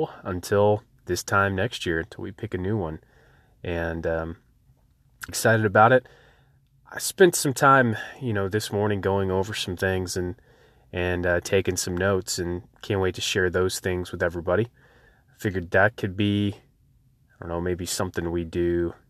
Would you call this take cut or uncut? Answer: cut